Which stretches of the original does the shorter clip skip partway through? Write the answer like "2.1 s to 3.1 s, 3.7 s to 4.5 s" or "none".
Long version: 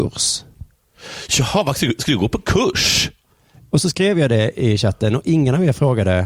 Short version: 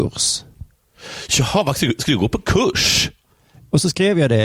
none